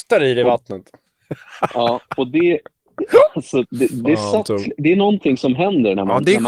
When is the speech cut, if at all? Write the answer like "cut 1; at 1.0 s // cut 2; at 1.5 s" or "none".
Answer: cut 1; at 3.6 s